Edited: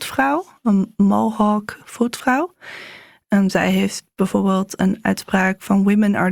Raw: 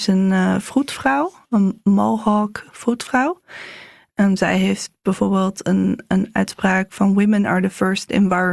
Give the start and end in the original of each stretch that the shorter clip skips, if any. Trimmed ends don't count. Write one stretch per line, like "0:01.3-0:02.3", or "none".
0:05.6-0:06.1